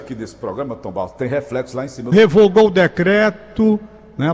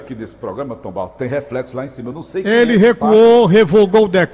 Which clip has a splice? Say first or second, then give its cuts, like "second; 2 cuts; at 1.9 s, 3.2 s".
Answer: first; 1 cut; at 2.1 s